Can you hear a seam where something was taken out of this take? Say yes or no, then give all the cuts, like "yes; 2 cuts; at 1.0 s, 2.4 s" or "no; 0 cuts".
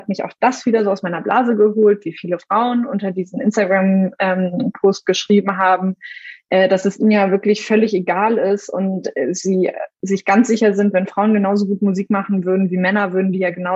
no; 0 cuts